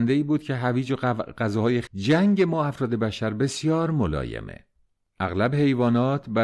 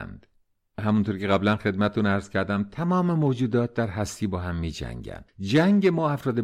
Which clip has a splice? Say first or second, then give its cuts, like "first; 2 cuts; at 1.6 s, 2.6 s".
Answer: first; 1 cut; at 1.9 s